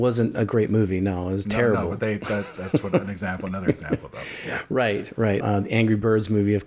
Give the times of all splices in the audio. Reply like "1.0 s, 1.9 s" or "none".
5.4 s